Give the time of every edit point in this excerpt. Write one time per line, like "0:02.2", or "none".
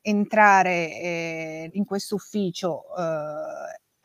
0:01.7